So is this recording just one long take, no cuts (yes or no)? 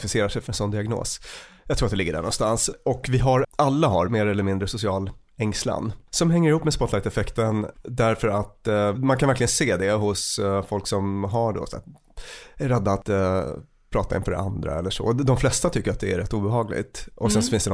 no